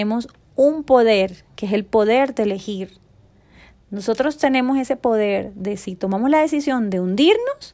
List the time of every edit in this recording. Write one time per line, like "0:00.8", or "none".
none